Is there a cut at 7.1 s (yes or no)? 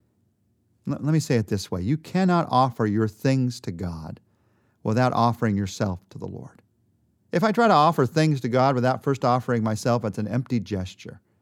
yes